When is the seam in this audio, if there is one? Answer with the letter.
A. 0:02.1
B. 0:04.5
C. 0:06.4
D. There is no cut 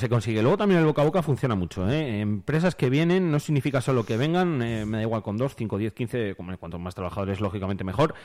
D